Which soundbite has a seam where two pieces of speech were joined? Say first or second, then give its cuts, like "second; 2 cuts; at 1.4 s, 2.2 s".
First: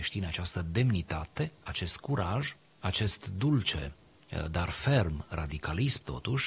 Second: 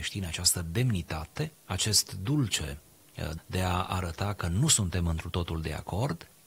second; 2 cuts; at 1.5 s, 3.4 s